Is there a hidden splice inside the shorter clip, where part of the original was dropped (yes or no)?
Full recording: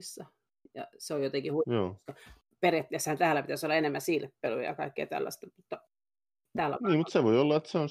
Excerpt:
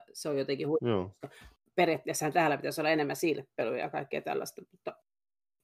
no